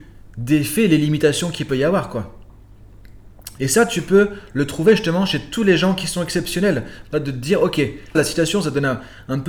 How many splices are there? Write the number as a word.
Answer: three